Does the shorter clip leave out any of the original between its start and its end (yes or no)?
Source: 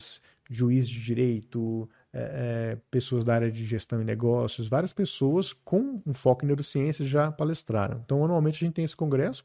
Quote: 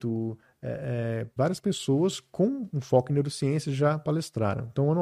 yes